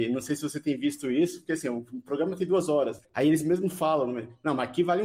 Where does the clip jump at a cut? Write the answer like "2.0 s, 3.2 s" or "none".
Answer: none

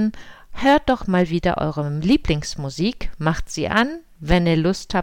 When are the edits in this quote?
1.0 s

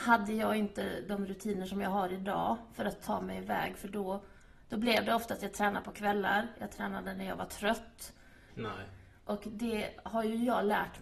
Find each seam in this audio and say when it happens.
8.5 s

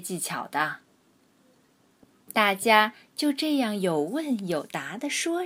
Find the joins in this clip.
none

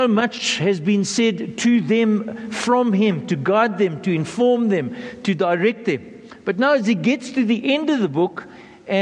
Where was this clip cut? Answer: none

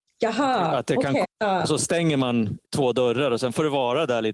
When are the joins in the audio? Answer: 1.2 s, 2.6 s

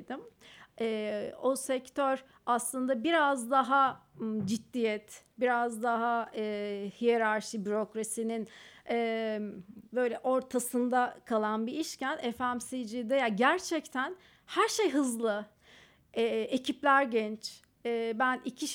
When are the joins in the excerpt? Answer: none

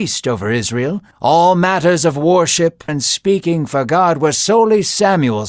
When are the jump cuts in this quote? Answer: 1.1 s, 2.9 s

